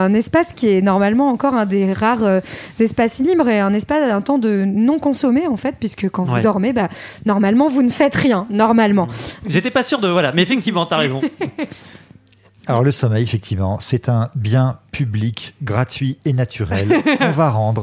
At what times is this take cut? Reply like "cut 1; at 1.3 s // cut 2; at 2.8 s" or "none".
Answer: cut 1; at 9.4 s